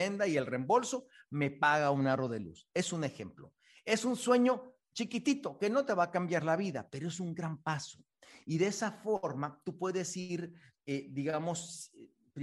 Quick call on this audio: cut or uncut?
uncut